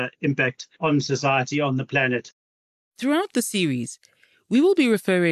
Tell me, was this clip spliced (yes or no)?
no